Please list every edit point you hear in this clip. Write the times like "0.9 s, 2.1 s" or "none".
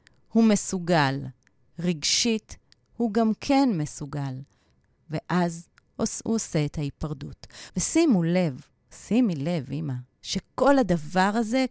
7.7 s